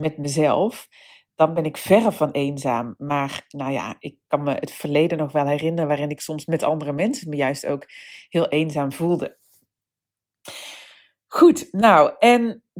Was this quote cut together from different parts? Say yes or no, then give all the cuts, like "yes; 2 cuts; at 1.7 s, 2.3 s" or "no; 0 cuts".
no; 0 cuts